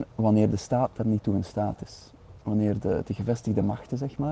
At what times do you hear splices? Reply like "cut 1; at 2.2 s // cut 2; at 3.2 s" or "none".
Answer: none